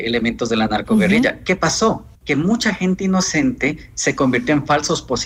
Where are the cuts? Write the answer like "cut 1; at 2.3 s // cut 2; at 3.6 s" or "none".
cut 1; at 2.2 s